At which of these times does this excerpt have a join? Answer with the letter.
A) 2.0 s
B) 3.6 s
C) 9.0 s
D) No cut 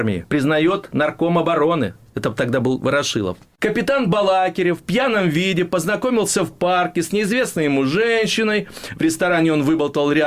B